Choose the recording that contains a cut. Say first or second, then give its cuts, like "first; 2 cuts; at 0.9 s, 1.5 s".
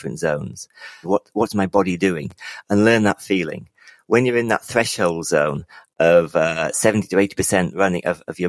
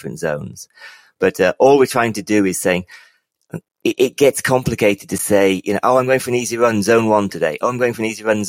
first; 1 cut; at 1.0 s